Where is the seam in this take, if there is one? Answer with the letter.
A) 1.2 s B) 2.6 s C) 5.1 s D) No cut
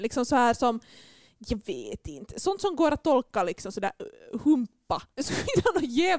C